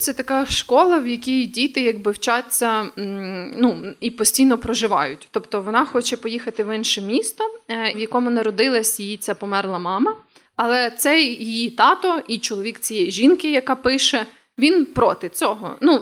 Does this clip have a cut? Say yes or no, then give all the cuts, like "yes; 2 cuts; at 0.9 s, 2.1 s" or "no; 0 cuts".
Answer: yes; 2 cuts; at 7.9 s, 10.5 s